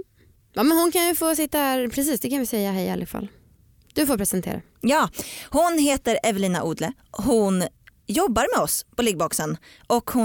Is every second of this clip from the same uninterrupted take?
yes; 0 cuts

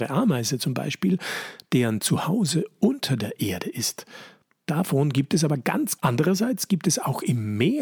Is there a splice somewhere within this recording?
yes; 2 cuts; at 4.6 s, 6.0 s

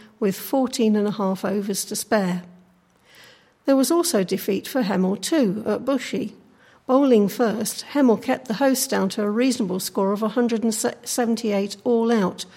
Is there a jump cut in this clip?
no; 0 cuts

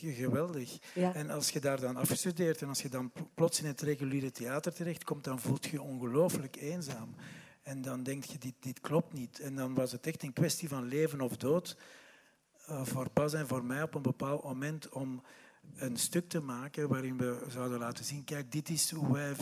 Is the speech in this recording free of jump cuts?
yes; 0 cuts

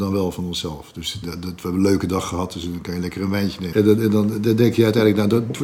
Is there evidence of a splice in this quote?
yes; 2 cuts; at 1.2 s, 3.7 s

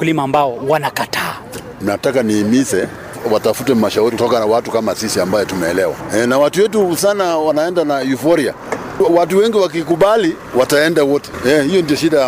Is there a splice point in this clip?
yes; 1 cut; at 7.0 s

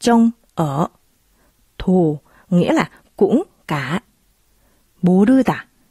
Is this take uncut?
yes; 0 cuts

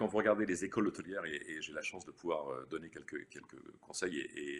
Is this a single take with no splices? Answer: yes; 0 cuts

